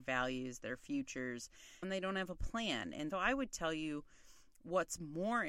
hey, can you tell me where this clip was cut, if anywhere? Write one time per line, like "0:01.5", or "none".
0:01.8
0:03.1